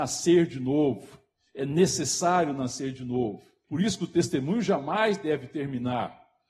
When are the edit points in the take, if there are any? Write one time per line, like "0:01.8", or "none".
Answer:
0:03.6